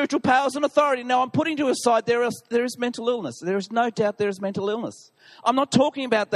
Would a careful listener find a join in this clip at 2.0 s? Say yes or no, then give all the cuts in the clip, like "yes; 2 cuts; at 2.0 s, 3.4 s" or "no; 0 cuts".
no; 0 cuts